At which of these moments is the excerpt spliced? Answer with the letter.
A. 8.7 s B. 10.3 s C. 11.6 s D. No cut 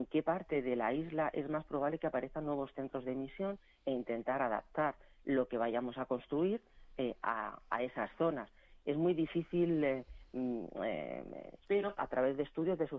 C